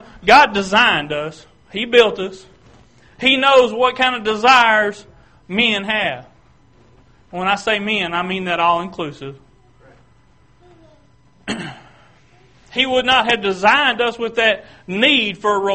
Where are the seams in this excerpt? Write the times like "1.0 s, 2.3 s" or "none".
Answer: none